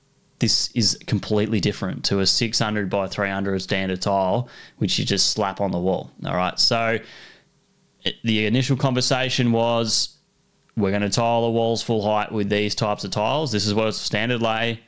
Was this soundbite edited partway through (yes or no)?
no